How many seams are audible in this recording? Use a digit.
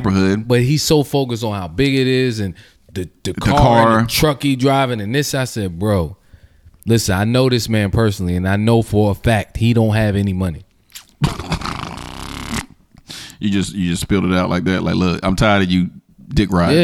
0